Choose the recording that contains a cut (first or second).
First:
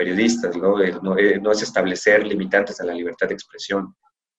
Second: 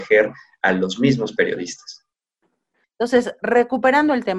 second